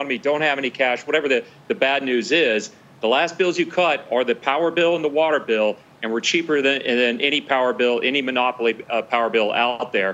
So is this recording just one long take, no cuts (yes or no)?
yes